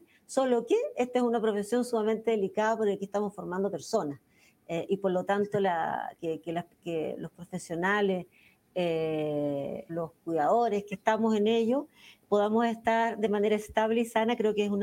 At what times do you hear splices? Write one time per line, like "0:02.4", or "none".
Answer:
0:06.2
0:09.9